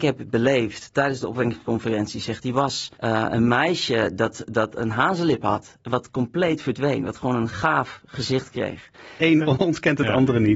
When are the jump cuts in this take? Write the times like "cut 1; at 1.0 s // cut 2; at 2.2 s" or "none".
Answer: cut 1; at 2.9 s // cut 2; at 9.2 s